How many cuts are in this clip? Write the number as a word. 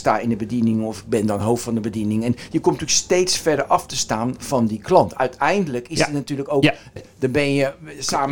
one